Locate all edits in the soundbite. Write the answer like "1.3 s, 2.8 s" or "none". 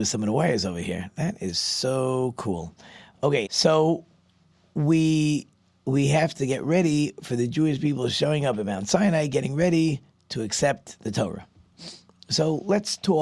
3.5 s